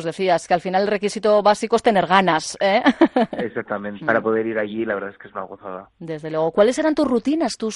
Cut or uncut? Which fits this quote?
cut